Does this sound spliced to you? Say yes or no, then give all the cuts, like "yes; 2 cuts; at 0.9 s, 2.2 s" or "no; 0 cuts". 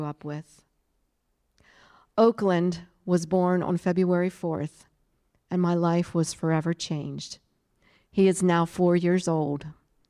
no; 0 cuts